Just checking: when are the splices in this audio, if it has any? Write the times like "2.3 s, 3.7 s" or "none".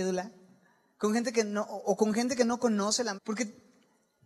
3.2 s